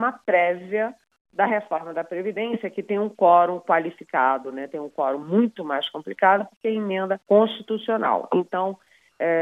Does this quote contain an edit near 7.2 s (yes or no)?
yes